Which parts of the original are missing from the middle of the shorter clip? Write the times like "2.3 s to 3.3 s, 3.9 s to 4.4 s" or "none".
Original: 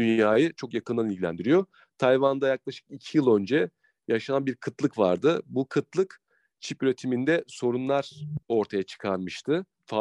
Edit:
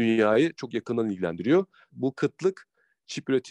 1.9 s to 5.4 s